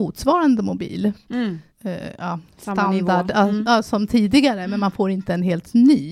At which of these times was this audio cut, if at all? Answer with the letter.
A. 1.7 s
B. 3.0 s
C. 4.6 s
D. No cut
A